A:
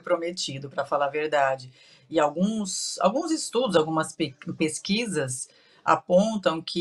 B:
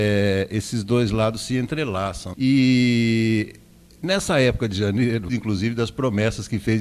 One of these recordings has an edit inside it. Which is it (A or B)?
B